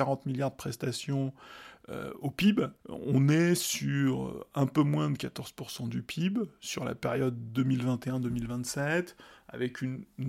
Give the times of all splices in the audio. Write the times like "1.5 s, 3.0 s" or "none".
2.8 s